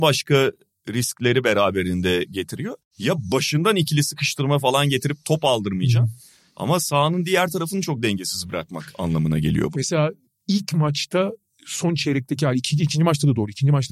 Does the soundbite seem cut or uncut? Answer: cut